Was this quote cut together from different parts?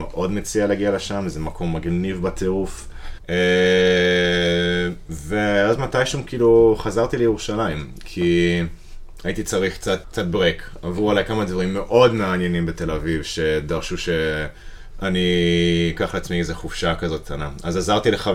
yes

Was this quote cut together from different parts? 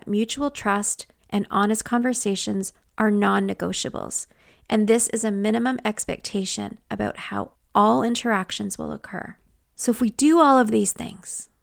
yes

